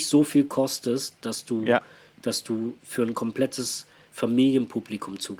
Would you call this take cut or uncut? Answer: uncut